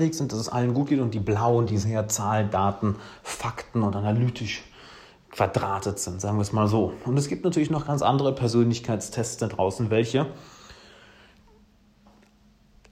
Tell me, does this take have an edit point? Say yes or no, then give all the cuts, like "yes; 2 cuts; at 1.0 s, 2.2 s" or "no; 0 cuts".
no; 0 cuts